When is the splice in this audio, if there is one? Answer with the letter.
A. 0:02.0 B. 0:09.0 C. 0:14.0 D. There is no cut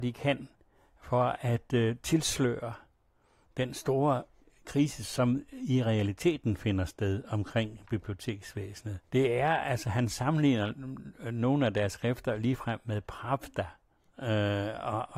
B